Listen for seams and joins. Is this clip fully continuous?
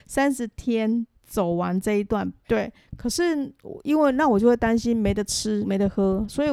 no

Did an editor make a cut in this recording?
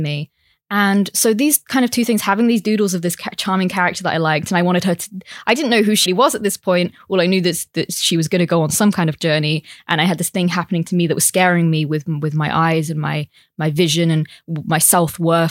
yes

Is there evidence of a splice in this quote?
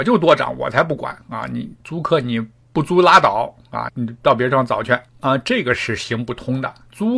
yes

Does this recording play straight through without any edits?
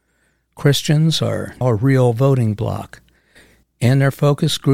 no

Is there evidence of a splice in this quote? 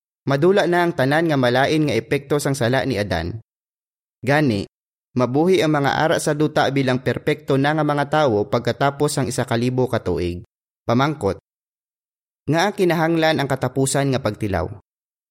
yes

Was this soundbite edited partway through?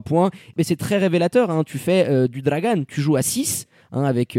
no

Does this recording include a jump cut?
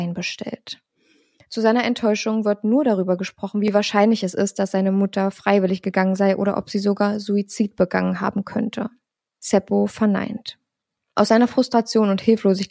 no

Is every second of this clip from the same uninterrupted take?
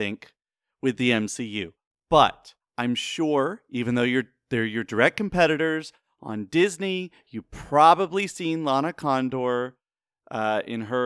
yes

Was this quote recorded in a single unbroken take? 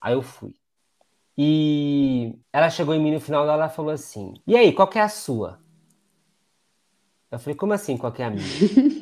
no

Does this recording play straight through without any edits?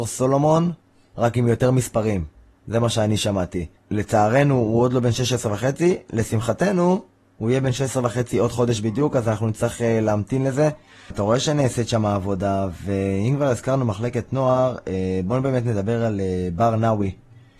no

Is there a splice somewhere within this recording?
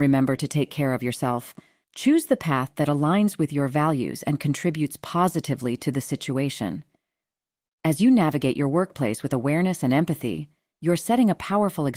yes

